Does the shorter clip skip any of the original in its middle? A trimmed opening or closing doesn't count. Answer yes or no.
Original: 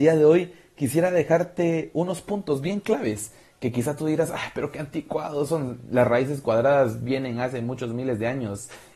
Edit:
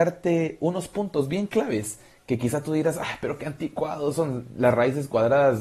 no